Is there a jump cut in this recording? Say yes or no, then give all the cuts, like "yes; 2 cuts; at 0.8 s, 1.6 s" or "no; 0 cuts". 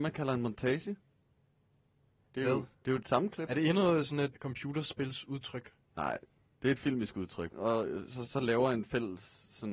yes; 2 cuts; at 4.3 s, 7.5 s